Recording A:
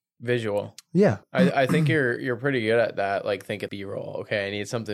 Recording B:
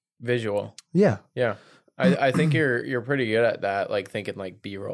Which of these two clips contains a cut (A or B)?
A